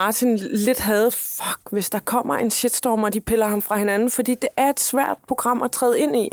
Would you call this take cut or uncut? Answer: cut